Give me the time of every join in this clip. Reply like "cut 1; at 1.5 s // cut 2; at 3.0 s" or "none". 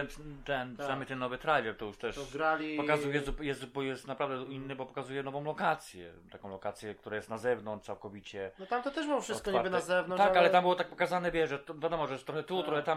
none